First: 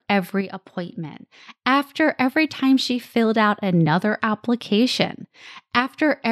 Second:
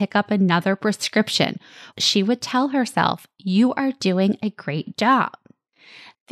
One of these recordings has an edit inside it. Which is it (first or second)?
second